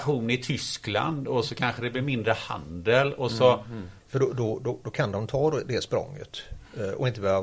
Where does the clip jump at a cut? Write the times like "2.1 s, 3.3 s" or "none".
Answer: 4.0 s